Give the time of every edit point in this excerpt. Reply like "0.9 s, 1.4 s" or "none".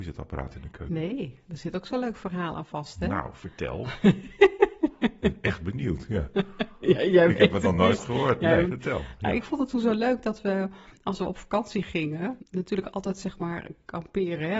8.6 s